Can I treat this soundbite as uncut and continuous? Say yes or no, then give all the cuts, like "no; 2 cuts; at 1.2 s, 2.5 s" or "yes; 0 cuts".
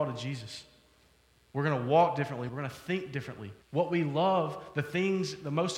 no; 3 cuts; at 1.4 s, 2.5 s, 3.6 s